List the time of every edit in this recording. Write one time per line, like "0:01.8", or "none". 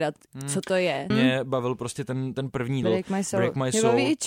0:01.1
0:02.8